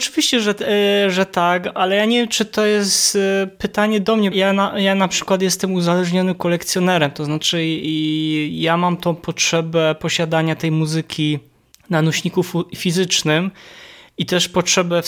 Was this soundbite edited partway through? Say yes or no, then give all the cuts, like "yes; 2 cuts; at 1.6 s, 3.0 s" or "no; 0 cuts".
yes; 1 cut; at 4.3 s